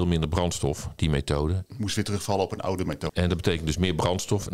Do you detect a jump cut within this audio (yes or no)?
yes